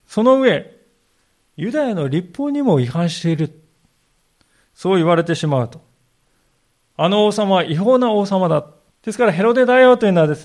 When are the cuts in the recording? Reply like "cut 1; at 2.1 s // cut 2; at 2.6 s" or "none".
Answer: cut 1; at 8.9 s